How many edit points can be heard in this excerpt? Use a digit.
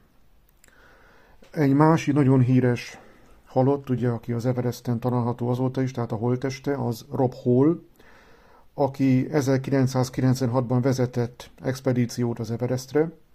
0